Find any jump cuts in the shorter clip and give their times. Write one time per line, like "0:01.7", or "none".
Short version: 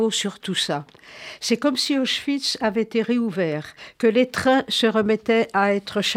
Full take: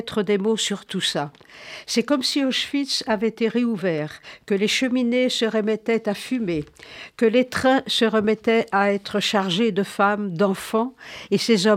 0:03.9